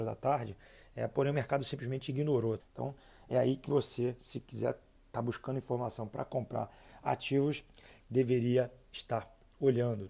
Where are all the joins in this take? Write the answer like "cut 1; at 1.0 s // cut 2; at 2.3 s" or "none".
cut 1; at 2.6 s